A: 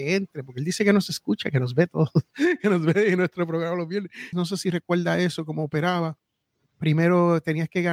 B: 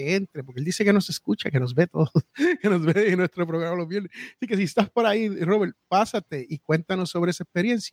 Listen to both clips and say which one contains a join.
A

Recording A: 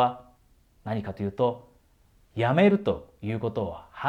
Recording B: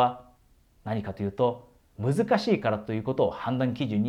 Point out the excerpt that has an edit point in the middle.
B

